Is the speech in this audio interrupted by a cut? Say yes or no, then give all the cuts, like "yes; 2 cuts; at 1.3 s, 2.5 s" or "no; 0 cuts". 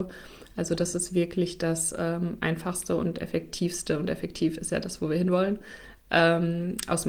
no; 0 cuts